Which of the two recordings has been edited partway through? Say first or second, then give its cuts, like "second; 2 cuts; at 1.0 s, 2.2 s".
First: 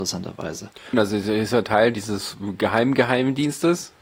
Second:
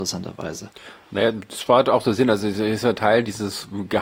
first; 1 cut; at 0.9 s